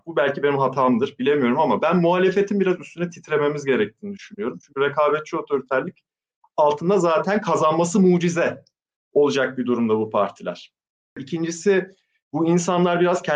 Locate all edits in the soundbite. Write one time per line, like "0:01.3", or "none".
none